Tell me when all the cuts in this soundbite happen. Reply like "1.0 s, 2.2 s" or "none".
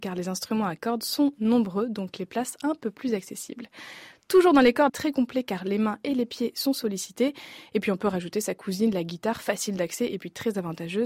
4.9 s